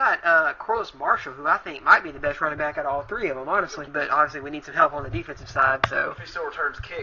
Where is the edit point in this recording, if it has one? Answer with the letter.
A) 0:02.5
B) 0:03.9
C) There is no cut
B